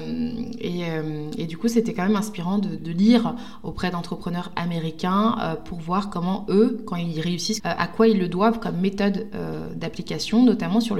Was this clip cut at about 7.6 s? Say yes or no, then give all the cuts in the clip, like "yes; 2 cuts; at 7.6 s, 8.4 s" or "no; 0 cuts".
yes; 2 cuts; at 2.8 s, 7.6 s